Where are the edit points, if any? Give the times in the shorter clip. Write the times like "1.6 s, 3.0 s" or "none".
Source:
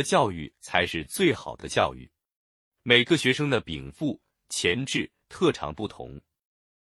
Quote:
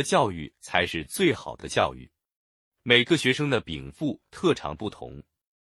4.3 s